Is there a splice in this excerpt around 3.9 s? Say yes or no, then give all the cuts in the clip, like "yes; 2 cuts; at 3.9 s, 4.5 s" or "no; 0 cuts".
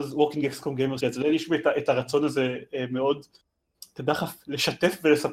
no; 1 cut; at 1.0 s